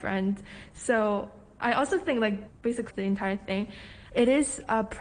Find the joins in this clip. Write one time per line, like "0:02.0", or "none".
0:02.9
0:04.1